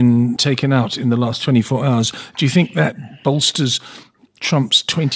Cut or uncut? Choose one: uncut